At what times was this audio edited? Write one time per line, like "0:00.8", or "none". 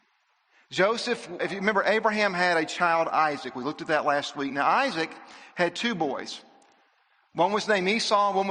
0:01.4

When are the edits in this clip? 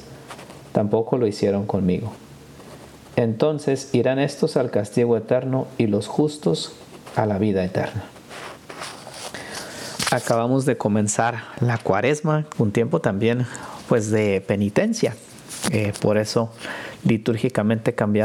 0:12.5

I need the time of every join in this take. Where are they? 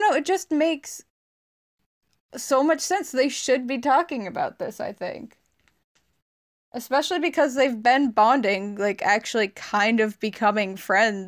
none

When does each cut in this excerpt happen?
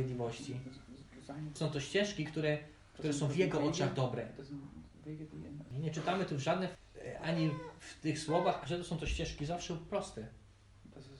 0:07.2
0:08.6

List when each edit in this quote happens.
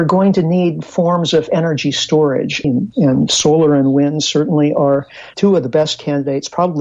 0:02.6

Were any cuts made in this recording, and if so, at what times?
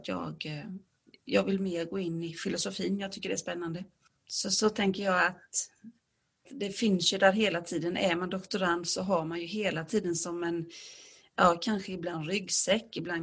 0:06.5

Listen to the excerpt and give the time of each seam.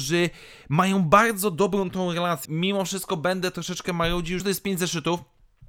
0:02.4
0:04.4

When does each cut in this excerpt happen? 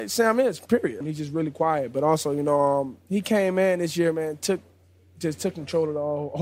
0:01.0

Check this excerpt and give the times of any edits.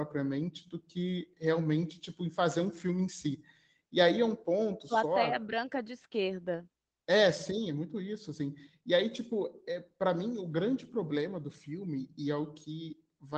none

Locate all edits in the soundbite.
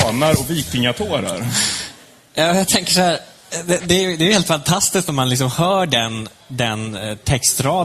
none

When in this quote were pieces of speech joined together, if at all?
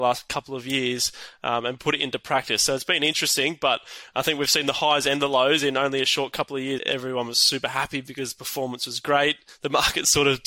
0:06.8

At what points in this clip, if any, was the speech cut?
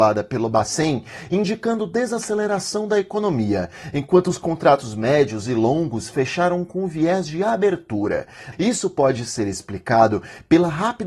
0:08.5

